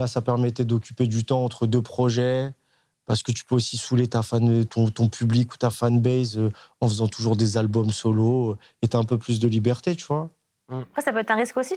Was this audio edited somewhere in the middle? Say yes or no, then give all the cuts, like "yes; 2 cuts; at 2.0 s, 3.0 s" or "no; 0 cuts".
no; 0 cuts